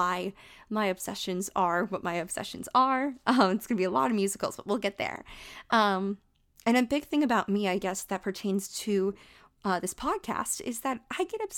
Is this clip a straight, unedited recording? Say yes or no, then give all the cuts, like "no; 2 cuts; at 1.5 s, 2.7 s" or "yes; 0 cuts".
yes; 0 cuts